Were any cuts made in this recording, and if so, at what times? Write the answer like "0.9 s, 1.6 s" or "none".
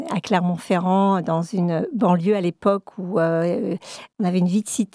none